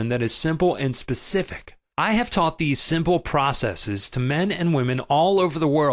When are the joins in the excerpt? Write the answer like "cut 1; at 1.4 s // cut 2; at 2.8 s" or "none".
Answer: cut 1; at 1.9 s